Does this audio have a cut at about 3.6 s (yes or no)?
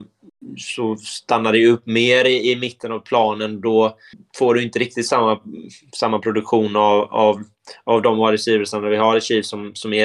no